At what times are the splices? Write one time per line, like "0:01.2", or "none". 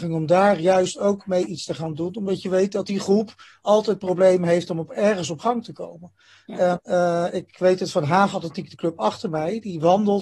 0:06.8